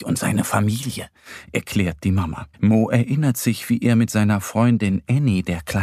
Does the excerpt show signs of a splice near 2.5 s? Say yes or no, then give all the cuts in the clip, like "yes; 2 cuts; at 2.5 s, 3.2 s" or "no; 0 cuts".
yes; 1 cut; at 2.5 s